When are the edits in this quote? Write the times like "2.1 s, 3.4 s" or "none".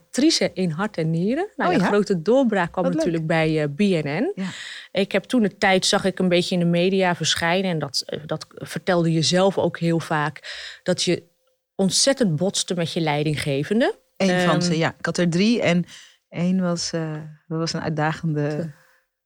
none